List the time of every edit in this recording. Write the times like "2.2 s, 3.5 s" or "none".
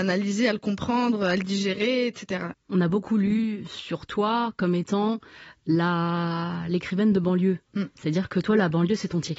2.5 s